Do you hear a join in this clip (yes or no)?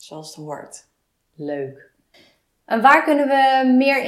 no